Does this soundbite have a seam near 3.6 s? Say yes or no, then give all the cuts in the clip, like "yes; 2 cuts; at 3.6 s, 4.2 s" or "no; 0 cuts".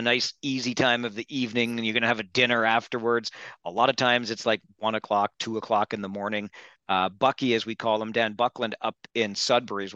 no; 0 cuts